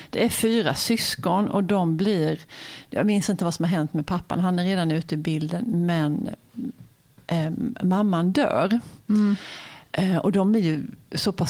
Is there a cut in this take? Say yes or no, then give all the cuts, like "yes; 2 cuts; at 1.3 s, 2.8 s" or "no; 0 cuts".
no; 0 cuts